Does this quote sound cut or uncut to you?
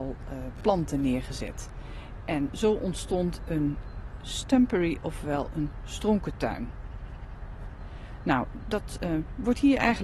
uncut